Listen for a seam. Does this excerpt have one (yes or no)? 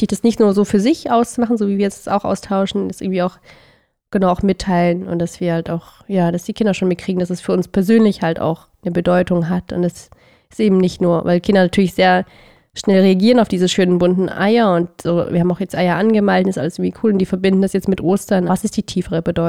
yes